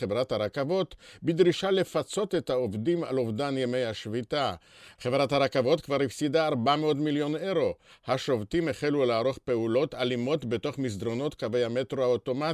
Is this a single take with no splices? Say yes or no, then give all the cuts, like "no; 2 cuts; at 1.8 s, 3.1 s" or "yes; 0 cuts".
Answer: no; 1 cut; at 5.0 s